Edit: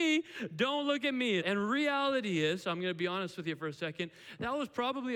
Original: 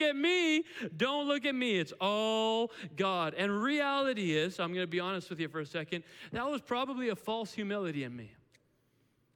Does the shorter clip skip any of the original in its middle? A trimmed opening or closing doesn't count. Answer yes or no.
yes